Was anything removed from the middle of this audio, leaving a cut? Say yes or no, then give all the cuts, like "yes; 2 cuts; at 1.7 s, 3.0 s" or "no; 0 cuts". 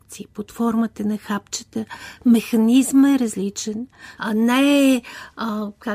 yes; 1 cut; at 4.2 s